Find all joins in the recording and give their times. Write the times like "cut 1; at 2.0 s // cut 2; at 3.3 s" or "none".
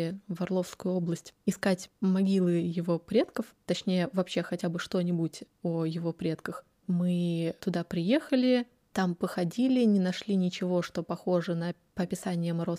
cut 1; at 6.8 s